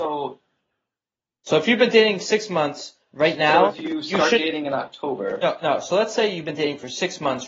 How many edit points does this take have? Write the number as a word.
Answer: zero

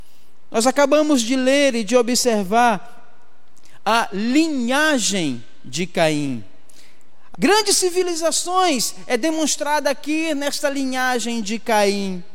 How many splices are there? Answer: one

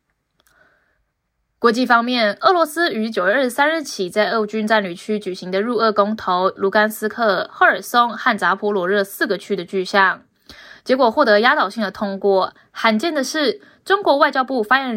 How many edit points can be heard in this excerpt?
one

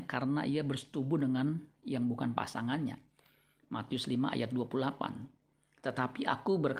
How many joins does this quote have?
zero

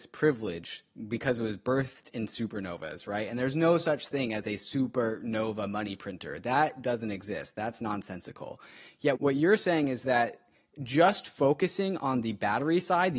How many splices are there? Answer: one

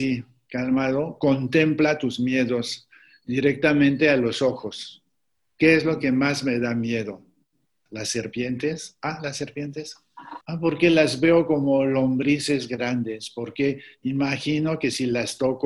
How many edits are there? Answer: two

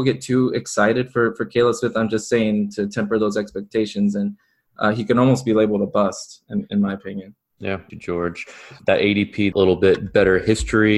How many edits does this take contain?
two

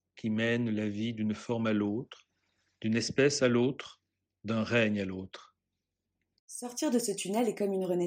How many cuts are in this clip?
one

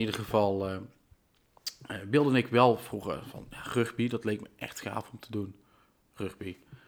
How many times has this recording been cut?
zero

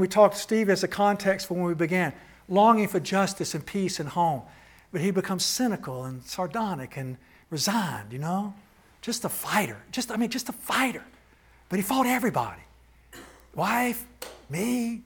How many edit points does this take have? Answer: zero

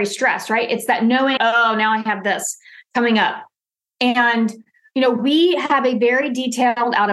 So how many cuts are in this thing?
one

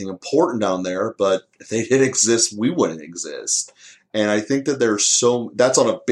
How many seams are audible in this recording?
zero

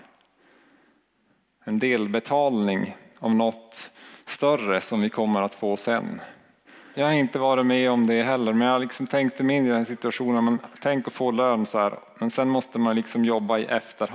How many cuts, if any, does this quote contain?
one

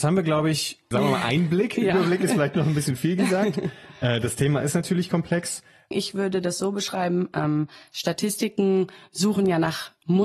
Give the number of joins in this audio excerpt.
two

